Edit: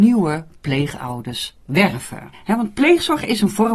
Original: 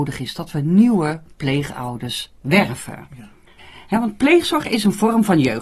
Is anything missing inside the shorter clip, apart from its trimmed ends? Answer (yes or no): yes